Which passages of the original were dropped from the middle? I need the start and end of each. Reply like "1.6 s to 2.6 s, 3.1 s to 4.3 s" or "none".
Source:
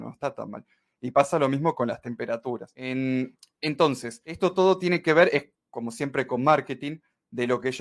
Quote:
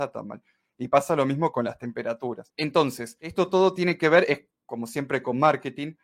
2.7 s to 3.5 s

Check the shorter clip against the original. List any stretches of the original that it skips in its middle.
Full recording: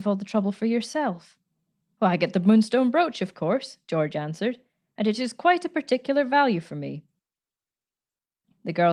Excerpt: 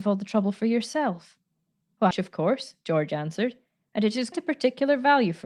2.1 s to 3.1 s, 5.4 s to 5.6 s

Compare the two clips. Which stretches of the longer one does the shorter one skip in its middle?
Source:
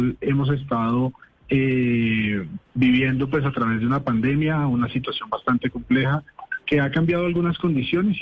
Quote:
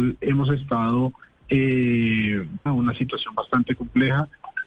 2.7 s to 4.6 s

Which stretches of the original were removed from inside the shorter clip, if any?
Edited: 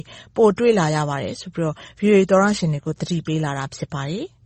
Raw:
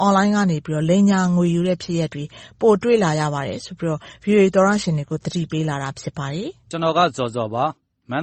none

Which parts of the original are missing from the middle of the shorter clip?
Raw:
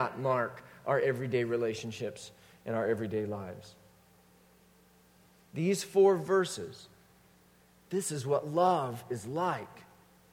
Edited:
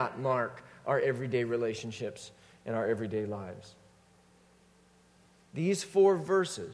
none

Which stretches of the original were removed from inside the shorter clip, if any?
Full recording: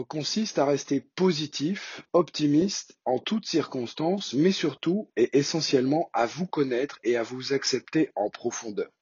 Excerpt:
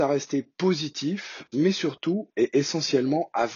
2.1 s to 4.3 s

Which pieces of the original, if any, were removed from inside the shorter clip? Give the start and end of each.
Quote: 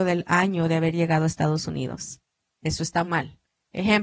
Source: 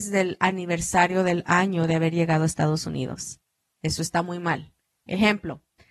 4.2 s to 4.4 s

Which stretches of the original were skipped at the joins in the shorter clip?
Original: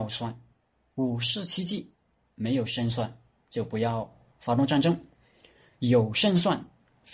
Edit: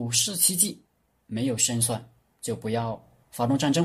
none

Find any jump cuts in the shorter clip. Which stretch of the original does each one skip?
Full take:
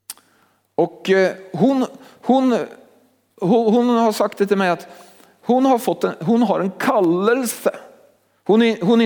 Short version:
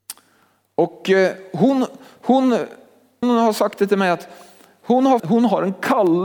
3.2 s to 3.8 s, 5.8 s to 6.2 s

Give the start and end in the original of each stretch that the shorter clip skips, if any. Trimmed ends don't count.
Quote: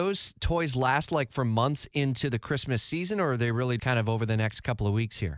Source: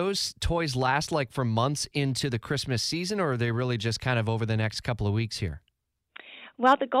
3.8 s to 4.0 s

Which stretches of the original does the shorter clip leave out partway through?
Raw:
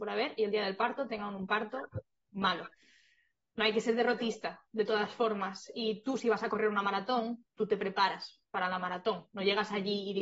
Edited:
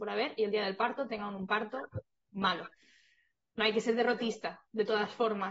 none

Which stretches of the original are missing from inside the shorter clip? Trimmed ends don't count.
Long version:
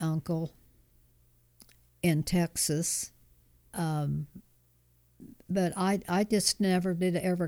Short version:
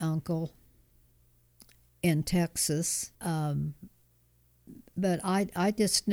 3.1 s to 3.7 s

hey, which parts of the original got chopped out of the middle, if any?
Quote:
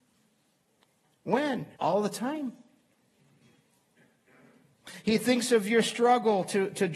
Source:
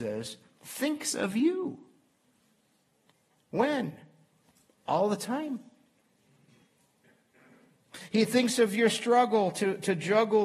4.0 s to 4.8 s

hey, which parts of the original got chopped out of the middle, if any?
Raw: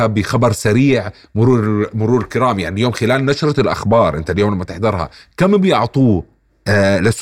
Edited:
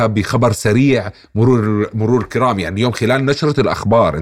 none

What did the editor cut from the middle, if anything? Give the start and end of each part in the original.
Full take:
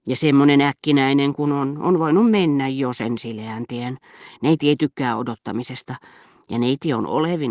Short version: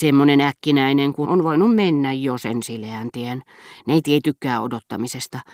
1.4 s to 1.8 s

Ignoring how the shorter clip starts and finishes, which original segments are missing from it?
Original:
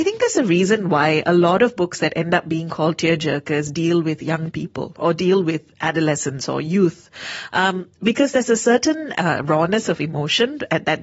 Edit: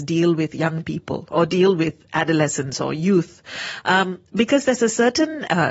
none

